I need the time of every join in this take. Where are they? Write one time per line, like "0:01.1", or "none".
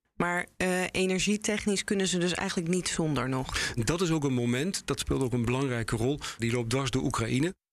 0:03.8
0:06.4